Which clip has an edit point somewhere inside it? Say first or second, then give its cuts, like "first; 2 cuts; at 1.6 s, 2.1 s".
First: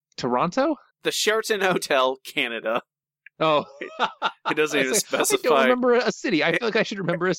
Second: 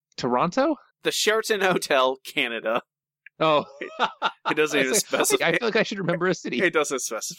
second; 1 cut; at 5.4 s